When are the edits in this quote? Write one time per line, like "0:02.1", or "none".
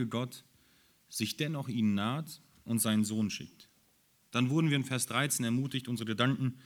0:04.3